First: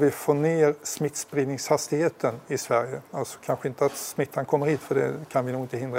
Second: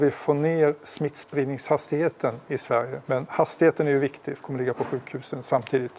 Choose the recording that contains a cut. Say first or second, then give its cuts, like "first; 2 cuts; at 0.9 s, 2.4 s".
second; 2 cuts; at 3.1 s, 4.4 s